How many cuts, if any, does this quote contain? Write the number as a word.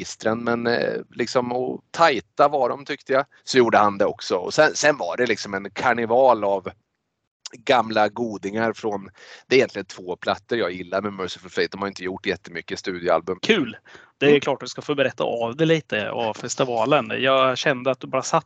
two